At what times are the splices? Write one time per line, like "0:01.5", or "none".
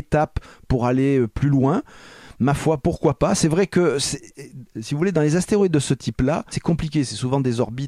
0:06.5